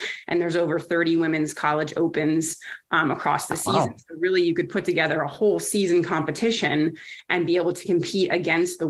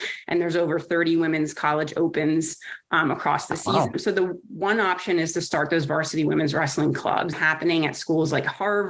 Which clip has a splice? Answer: second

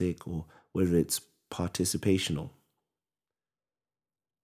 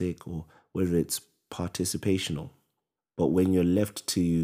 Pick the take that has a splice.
second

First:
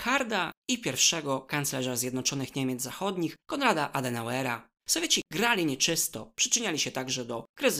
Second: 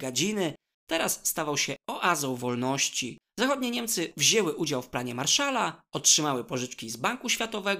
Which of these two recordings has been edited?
first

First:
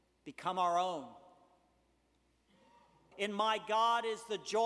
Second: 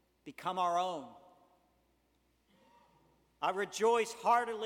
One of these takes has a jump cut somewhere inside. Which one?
first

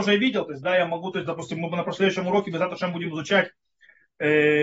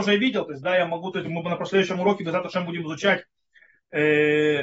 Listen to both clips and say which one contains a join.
second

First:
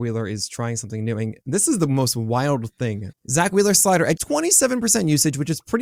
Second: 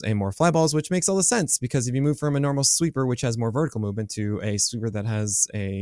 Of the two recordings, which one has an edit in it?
first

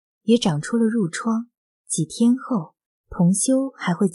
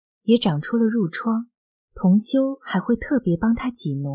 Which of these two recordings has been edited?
first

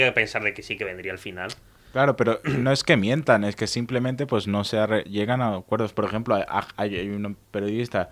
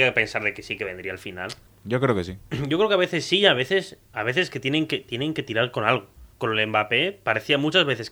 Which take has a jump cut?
second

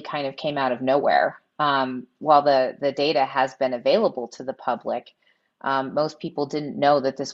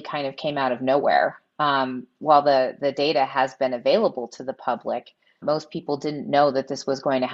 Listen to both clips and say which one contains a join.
second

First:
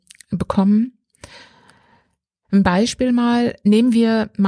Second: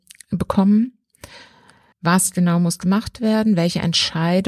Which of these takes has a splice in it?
second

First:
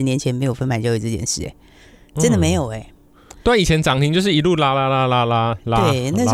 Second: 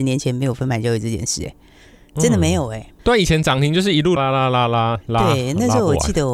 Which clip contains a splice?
second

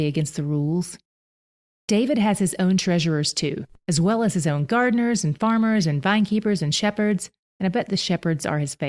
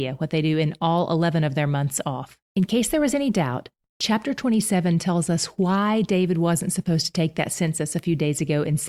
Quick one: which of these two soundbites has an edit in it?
second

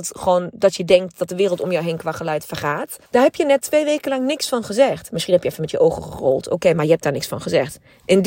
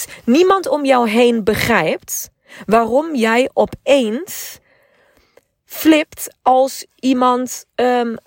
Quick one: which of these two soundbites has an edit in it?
first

